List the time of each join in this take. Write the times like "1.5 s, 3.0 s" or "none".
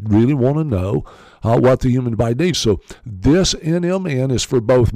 none